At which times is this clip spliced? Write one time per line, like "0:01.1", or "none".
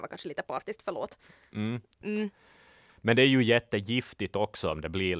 0:02.0